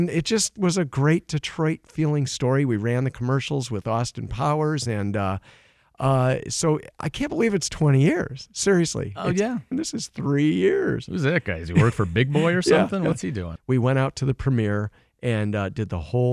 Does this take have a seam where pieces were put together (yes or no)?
yes